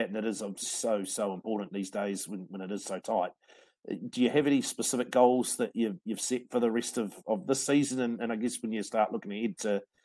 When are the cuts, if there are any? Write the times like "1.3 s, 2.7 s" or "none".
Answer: none